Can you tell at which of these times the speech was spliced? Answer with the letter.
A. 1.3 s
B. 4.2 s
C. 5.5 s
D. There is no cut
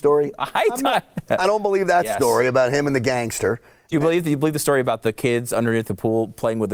A